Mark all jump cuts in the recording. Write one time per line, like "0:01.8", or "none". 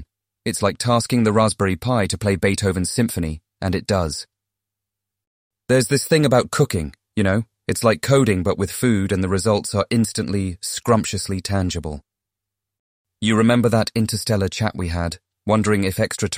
none